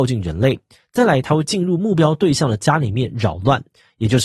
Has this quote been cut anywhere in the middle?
no; 0 cuts

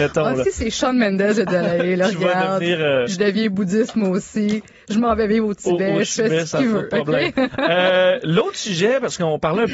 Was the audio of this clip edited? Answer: no; 0 cuts

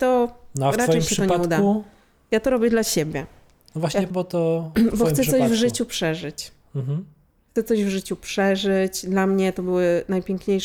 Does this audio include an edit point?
yes; 1 cut; at 4.1 s

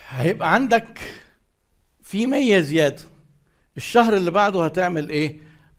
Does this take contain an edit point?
no; 0 cuts

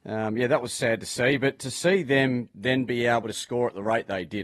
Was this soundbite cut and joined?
yes; 1 cut; at 3.3 s

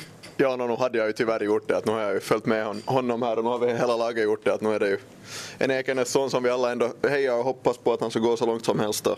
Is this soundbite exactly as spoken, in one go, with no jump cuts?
yes; 0 cuts

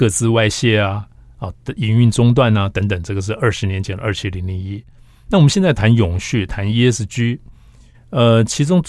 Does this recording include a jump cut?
no; 0 cuts

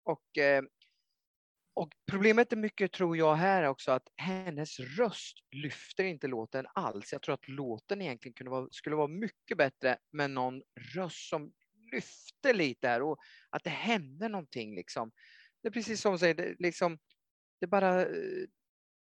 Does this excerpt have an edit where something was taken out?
no; 0 cuts

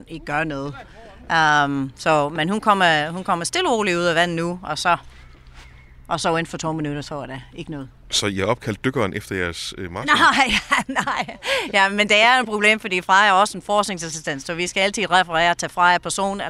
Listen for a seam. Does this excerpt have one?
no; 0 cuts

